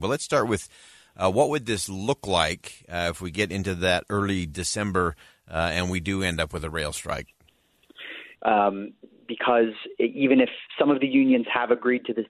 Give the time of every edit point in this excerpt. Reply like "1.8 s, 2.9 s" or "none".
8.3 s